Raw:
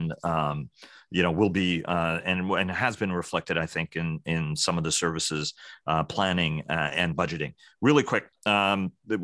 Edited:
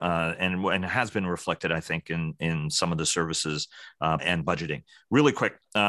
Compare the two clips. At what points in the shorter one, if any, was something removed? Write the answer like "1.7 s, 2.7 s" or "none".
4.2 s